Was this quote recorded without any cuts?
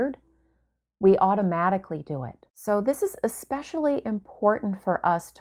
no; 1 cut; at 2.5 s

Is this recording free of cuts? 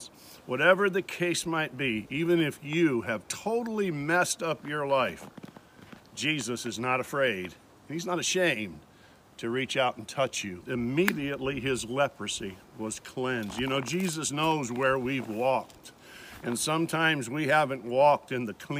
no; 1 cut; at 10.6 s

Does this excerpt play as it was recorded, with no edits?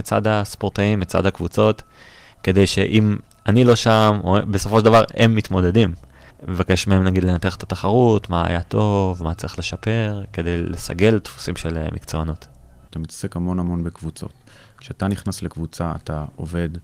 no; 2 cuts; at 6.3 s, 12.9 s

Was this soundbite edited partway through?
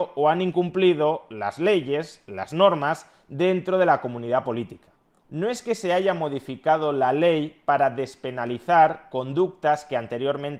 no; 0 cuts

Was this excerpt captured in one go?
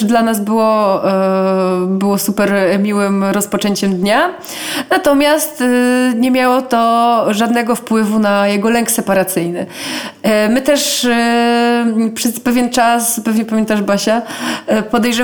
yes; 0 cuts

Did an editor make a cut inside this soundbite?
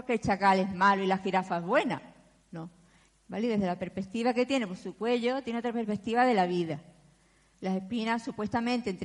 yes; 2 cuts; at 3.1 s, 7.5 s

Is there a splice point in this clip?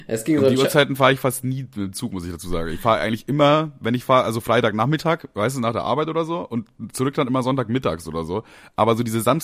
no; 0 cuts

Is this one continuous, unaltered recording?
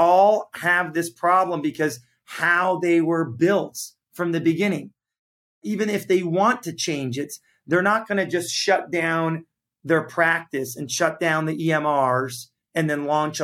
yes; 0 cuts

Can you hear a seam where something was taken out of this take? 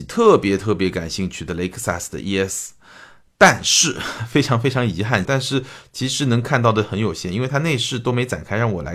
yes; 1 cut; at 5.2 s

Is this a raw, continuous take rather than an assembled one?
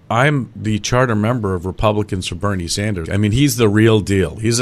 no; 1 cut; at 3.1 s

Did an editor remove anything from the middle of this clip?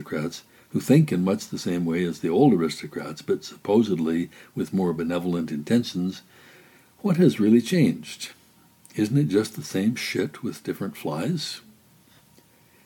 no; 0 cuts

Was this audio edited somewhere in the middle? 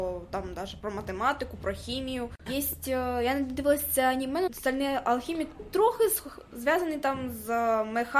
yes; 3 cuts; at 2.5 s, 4.5 s, 5.6 s

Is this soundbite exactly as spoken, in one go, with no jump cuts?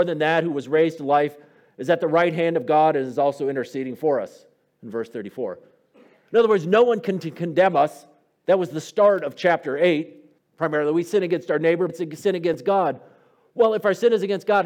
no; 2 cuts; at 10.4 s, 11.9 s

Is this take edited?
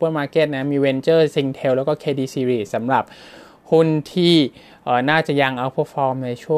no; 0 cuts

